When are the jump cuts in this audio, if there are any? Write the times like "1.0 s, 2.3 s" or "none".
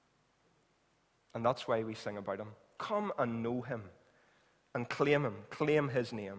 2.8 s

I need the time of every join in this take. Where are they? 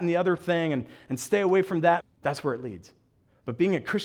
2.0 s

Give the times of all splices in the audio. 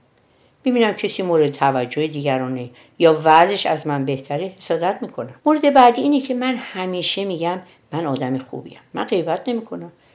5.4 s

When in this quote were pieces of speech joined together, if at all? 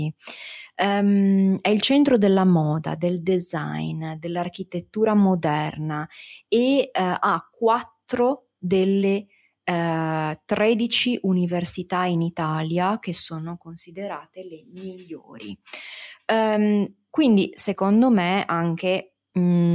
none

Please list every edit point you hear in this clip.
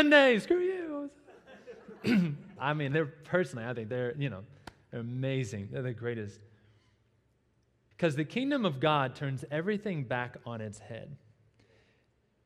2.6 s, 7.9 s

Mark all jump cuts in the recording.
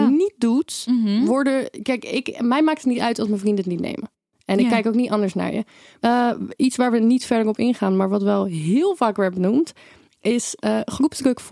6.0 s

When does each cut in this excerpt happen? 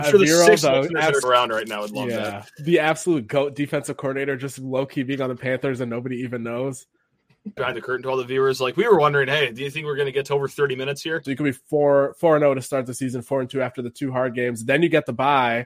1.2 s, 7.6 s, 11.2 s

